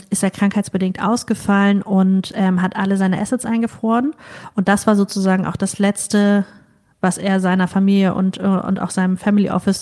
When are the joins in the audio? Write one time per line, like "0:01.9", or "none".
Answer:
none